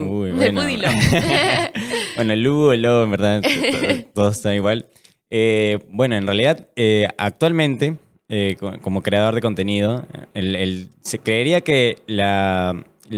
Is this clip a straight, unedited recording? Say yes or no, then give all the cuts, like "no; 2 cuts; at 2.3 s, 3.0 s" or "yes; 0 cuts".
yes; 0 cuts